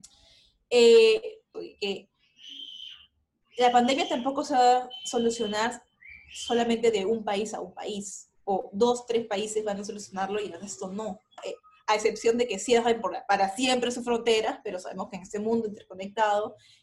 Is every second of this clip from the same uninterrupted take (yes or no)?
no